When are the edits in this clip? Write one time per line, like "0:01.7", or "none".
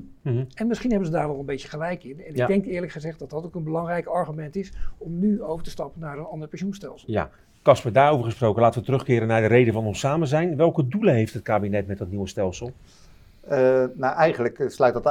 none

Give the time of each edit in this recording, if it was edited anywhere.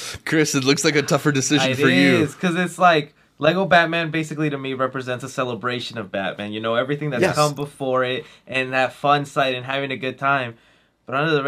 none

